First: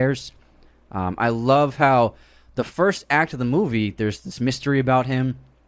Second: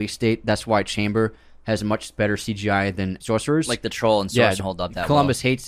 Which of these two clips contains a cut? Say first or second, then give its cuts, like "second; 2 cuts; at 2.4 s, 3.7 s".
second; 2 cuts; at 3.2 s, 4.6 s